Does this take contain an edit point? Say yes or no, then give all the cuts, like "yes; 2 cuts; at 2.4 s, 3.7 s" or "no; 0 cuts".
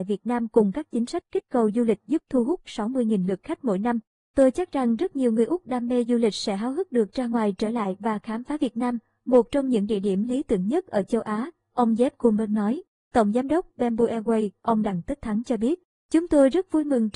no; 0 cuts